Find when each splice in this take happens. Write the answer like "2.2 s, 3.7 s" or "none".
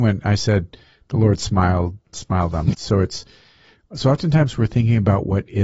2.7 s